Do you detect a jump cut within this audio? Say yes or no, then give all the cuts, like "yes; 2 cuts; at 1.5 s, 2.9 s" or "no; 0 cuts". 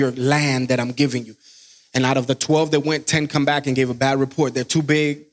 no; 0 cuts